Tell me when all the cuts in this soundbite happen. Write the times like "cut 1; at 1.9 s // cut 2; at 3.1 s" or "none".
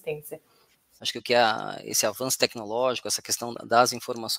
cut 1; at 1.0 s